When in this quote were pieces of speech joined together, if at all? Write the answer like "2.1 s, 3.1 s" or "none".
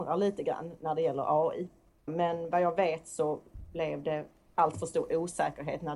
2.1 s